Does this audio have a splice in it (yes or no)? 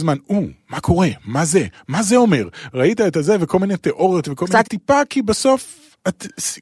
yes